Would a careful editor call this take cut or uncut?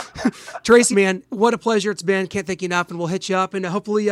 cut